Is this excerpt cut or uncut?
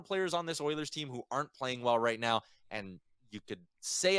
uncut